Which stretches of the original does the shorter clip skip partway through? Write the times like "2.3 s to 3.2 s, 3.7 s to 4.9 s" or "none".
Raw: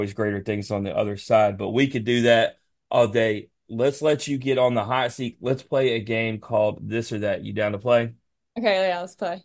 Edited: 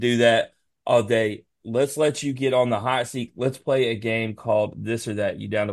none